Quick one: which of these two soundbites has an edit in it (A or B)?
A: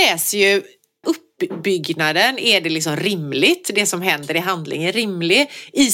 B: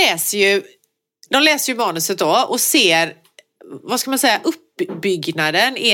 A